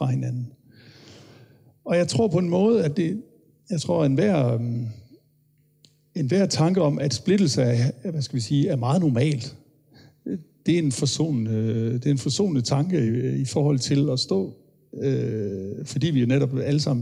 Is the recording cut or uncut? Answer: uncut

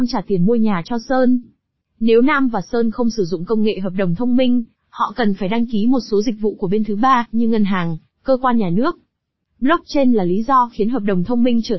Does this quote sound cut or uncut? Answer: uncut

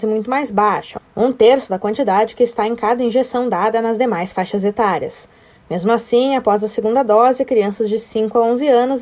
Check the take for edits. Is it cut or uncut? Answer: uncut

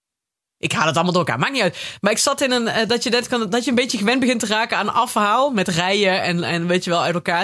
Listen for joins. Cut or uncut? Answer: uncut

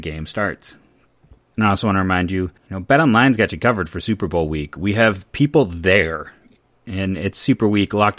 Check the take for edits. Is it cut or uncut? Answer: cut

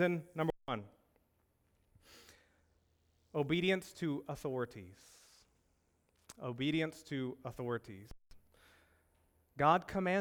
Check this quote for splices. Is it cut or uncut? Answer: uncut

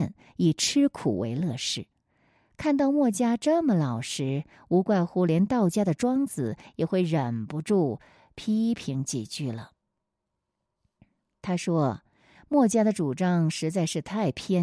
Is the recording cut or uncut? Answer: uncut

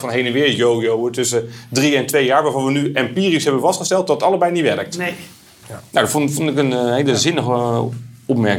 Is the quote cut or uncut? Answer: uncut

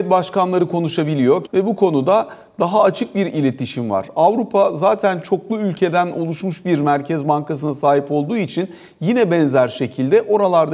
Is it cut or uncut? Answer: cut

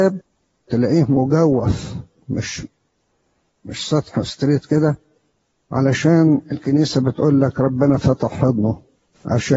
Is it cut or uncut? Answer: uncut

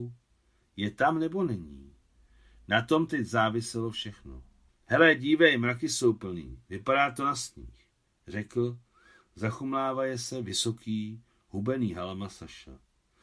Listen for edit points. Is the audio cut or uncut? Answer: uncut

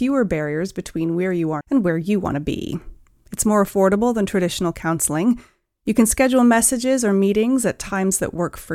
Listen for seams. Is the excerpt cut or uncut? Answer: cut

